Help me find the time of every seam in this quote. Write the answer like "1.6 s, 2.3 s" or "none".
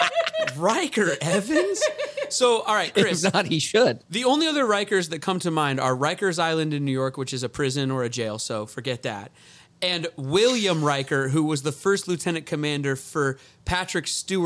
none